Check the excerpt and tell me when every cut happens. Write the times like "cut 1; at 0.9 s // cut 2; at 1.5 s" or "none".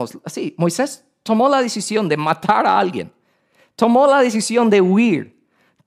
none